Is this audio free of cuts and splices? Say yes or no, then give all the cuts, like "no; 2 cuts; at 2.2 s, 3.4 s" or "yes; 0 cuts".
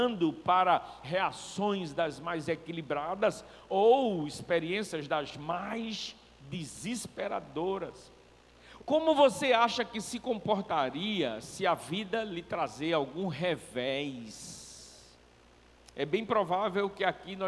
no; 1 cut; at 8.8 s